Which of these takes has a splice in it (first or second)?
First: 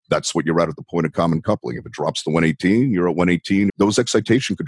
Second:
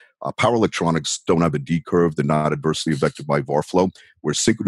first